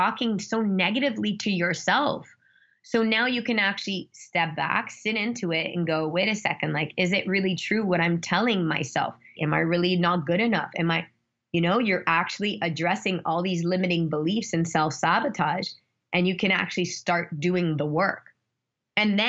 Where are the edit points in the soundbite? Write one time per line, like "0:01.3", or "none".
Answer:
0:09.3